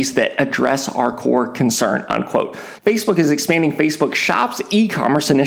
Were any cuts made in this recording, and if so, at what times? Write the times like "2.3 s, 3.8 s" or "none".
2.8 s